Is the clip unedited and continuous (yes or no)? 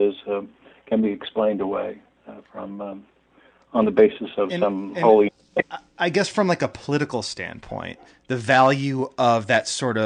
yes